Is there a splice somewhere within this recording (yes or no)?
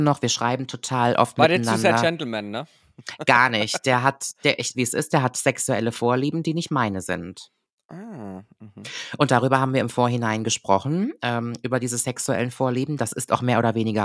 yes